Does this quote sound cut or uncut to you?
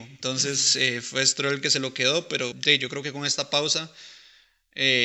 cut